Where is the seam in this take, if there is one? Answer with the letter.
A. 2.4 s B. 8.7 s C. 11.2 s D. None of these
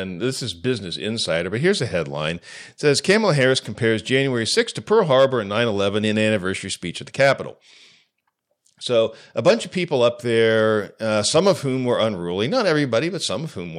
D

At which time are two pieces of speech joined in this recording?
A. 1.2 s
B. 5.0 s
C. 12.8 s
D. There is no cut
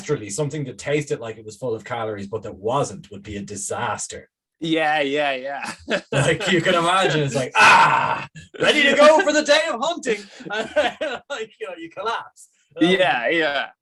D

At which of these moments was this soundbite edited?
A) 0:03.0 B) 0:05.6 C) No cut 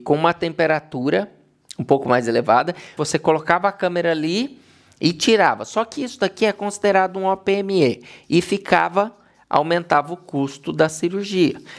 A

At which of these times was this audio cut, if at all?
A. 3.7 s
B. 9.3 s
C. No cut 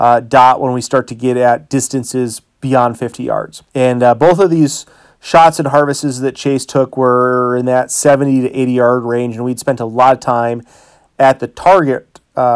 A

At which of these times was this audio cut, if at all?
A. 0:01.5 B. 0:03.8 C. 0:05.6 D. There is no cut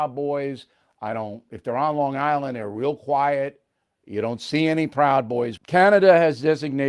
C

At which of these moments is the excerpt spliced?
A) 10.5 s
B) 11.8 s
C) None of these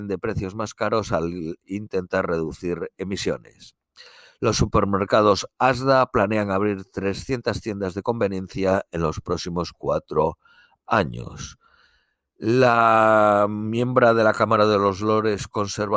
C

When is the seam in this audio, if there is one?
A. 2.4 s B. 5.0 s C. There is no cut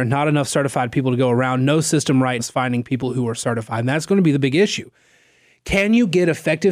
A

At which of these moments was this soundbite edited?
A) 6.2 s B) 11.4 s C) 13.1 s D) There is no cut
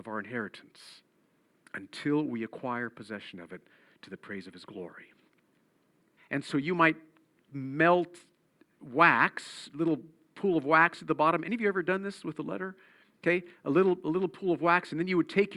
A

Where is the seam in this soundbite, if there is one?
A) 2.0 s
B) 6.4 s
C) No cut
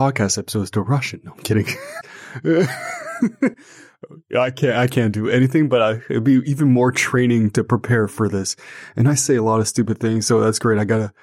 A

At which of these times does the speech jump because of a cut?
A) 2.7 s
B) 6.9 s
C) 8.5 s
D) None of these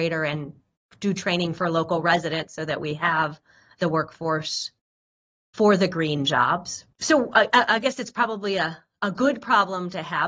B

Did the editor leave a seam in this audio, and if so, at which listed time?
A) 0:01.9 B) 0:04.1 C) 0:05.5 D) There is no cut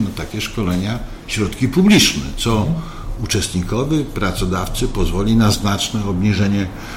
C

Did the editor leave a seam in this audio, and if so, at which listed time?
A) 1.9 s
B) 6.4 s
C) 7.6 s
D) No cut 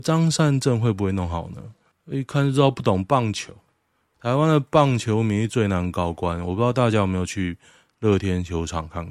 A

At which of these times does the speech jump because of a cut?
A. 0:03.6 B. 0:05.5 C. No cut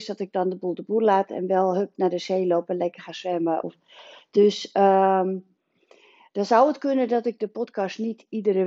A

